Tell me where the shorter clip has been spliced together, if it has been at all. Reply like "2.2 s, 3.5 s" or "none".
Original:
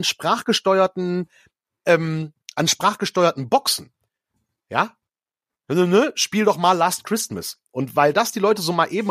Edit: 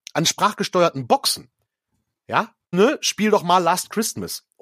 2.7 s